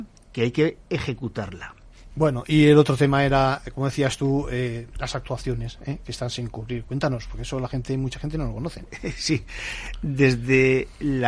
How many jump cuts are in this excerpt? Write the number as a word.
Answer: one